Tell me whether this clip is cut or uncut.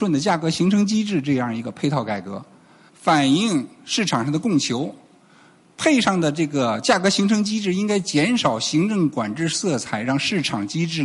cut